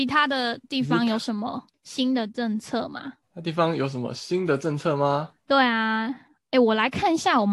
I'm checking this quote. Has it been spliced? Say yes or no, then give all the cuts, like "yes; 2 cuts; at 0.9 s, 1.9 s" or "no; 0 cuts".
no; 0 cuts